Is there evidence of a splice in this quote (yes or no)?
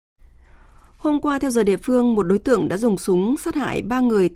no